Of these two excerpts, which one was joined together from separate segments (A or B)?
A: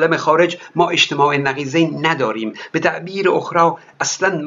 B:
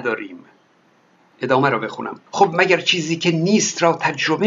B